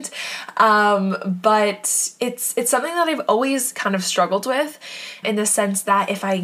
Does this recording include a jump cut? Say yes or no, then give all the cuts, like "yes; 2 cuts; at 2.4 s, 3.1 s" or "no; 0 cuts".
yes; 1 cut; at 5.2 s